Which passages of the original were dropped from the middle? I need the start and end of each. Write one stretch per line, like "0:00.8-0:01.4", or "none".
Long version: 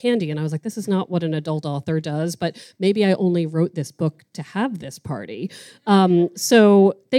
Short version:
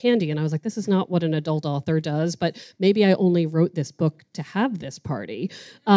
none